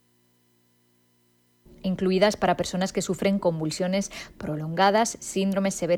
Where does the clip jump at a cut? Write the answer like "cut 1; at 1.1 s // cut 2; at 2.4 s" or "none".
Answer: none